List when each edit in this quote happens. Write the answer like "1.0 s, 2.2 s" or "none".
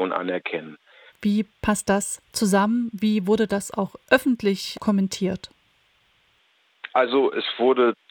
1.1 s, 4.7 s